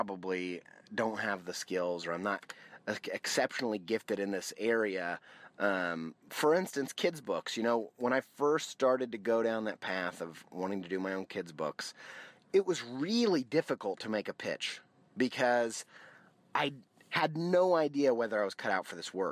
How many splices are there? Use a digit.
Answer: 0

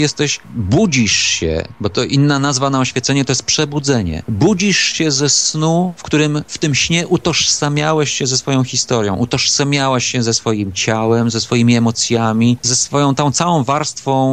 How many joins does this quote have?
0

